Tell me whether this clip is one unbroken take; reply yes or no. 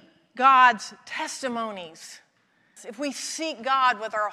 no